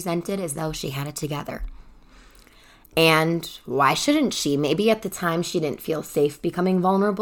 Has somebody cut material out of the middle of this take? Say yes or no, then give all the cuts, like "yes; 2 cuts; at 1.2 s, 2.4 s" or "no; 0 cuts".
no; 0 cuts